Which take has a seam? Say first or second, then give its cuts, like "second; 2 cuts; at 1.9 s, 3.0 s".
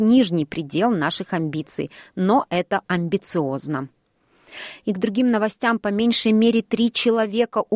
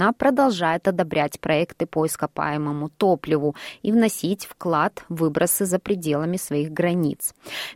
first; 1 cut; at 2.9 s